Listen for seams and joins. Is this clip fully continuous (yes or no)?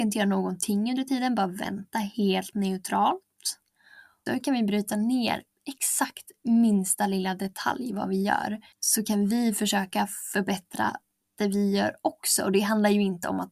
no